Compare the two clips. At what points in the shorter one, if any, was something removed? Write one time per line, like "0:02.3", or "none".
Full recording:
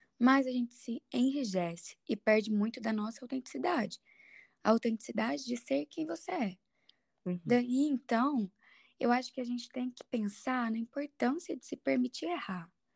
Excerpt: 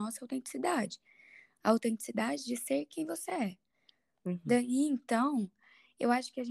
none